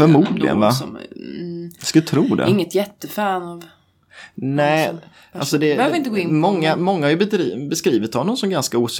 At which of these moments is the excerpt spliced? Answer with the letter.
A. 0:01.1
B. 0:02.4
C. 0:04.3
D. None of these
D